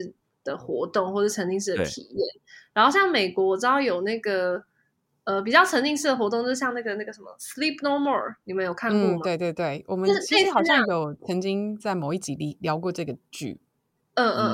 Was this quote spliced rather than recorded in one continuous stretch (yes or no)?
no